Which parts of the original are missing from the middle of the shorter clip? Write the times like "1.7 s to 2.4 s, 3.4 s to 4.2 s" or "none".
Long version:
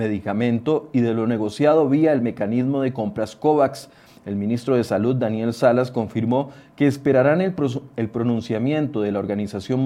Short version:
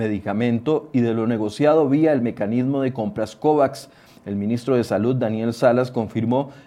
none